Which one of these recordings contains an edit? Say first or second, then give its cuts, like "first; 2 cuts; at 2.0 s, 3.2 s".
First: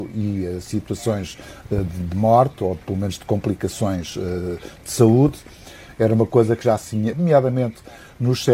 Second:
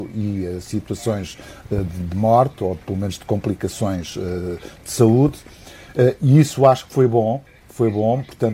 first; 2 cuts; at 5.9 s, 7.1 s